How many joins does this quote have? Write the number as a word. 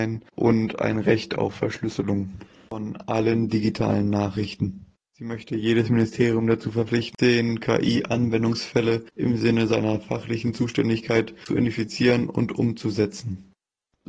one